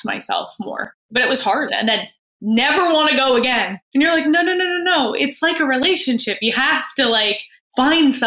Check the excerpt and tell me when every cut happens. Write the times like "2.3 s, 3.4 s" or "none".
1.7 s